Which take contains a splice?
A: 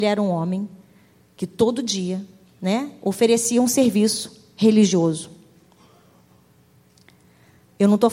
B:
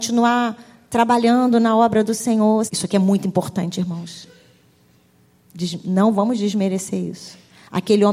B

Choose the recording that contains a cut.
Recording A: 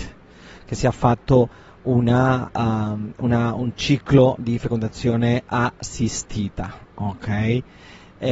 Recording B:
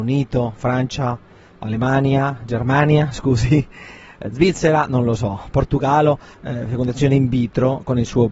B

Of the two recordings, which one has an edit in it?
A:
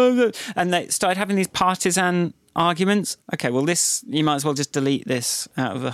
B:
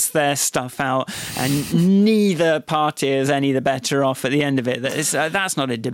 A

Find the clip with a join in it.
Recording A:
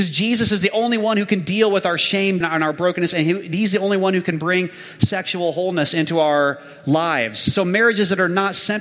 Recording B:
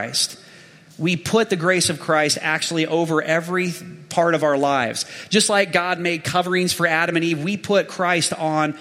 A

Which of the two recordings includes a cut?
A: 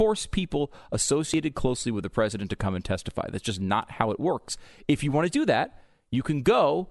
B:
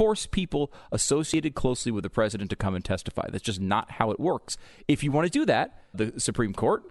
B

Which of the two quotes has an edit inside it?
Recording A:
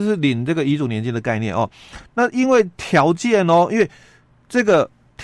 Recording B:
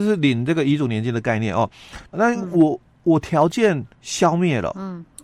B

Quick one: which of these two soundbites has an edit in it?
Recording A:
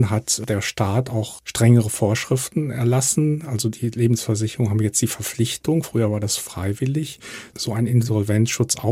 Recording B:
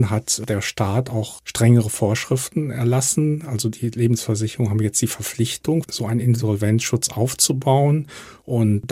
B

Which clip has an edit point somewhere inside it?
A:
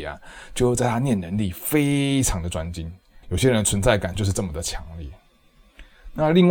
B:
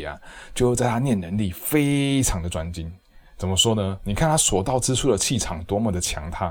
A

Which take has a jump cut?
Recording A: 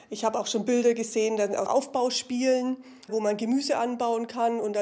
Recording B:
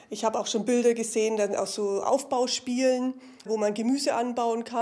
A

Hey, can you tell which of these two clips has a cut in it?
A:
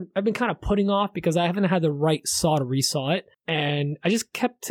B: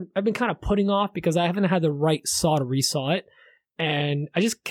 A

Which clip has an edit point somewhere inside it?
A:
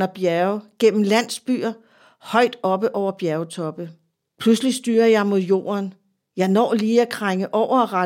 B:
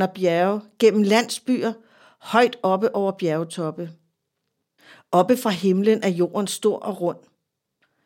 A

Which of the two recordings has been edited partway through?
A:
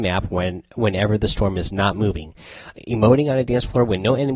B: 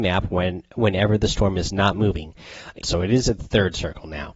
B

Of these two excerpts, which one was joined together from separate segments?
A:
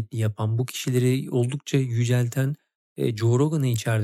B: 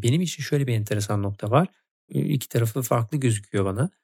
B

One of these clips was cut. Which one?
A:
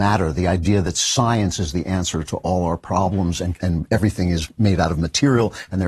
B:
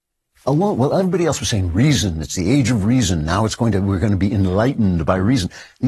A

